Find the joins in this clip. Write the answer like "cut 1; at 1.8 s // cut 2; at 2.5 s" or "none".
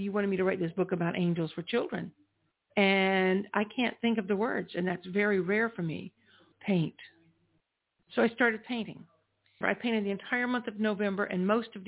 cut 1; at 6.5 s // cut 2; at 9.6 s